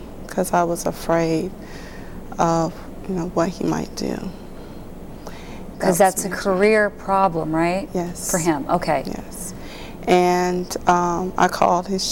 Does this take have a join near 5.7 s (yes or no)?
yes